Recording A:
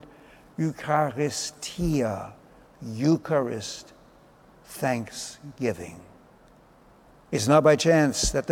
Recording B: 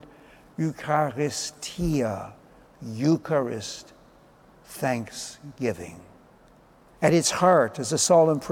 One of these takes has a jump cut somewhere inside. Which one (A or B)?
B